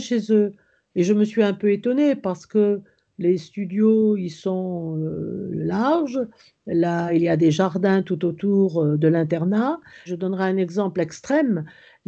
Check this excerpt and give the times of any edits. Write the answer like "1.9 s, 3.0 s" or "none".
10.1 s